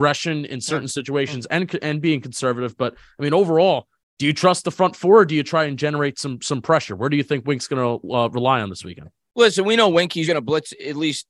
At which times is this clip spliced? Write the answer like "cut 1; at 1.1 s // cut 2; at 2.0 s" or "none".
cut 1; at 10.3 s

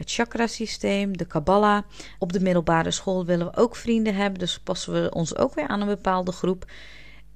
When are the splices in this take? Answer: cut 1; at 2.2 s // cut 2; at 5.7 s

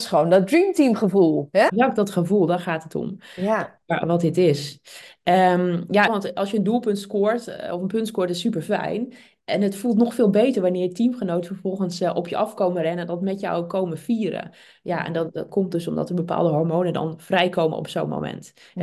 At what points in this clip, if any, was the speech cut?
cut 1; at 1.7 s // cut 2; at 6.1 s

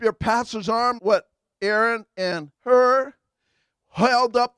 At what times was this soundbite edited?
cut 1; at 1.0 s // cut 2; at 2.5 s

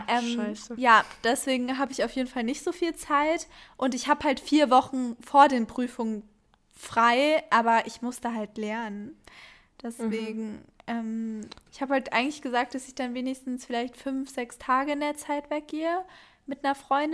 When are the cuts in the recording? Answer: cut 1; at 11.7 s

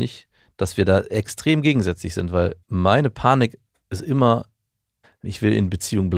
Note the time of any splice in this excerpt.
cut 1; at 2.6 s // cut 2; at 5.0 s

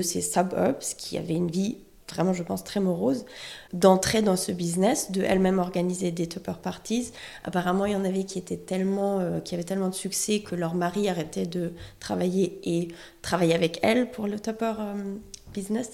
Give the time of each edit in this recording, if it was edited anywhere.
none

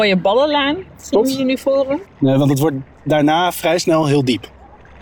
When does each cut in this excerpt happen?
cut 1; at 2.0 s

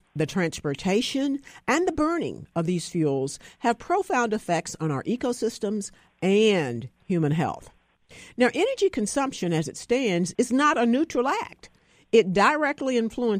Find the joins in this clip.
none

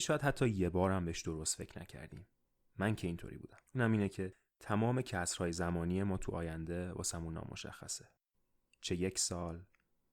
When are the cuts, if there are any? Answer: cut 1; at 3.7 s

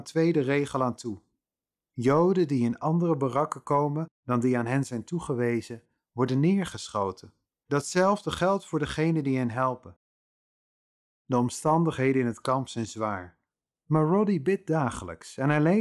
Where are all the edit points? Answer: none

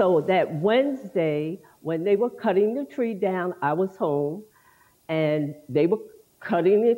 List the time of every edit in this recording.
none

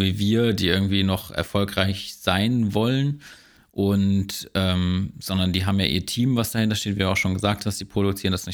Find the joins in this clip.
none

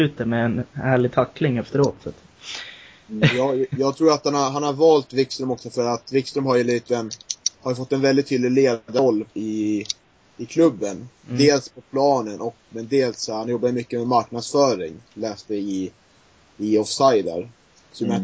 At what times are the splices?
none

